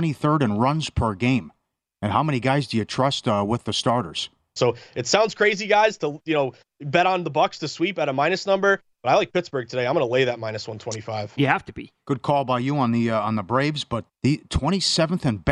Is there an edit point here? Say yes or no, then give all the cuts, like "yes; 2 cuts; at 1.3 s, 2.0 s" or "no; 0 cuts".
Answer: yes; 3 cuts; at 4.6 s, 11.4 s, 14.1 s